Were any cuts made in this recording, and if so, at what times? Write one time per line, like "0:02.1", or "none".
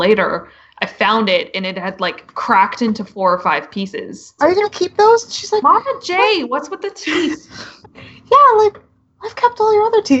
0:04.4
0:07.8